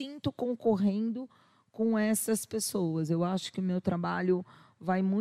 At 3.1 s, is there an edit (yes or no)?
no